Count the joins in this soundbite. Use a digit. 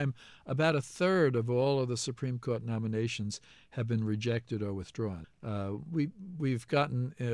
1